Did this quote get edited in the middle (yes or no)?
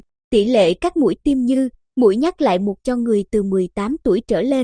no